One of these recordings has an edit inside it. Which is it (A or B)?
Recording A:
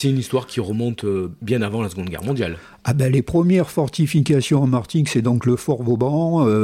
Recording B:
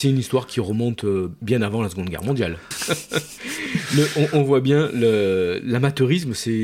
B